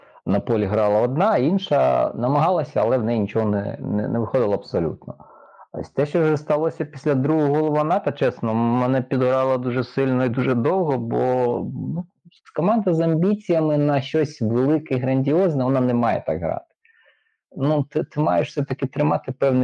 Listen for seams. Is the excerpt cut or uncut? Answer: uncut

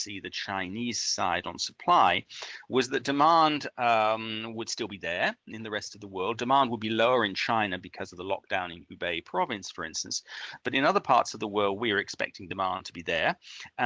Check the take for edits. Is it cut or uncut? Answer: uncut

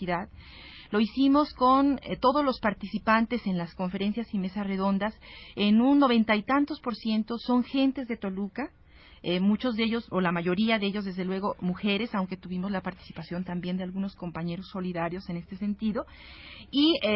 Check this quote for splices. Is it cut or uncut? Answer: cut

